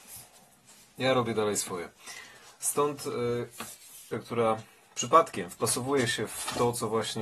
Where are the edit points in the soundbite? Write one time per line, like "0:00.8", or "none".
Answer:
0:04.1